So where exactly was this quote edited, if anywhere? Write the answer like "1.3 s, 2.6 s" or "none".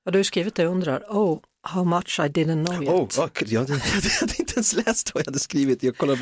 none